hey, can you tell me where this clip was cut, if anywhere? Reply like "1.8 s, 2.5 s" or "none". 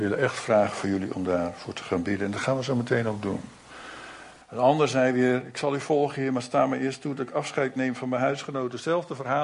4.4 s